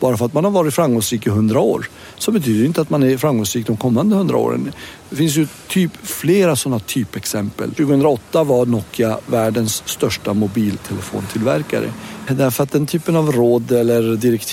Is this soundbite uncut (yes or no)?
no